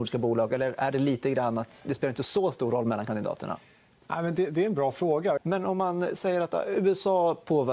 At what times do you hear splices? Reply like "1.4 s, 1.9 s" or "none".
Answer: 5.4 s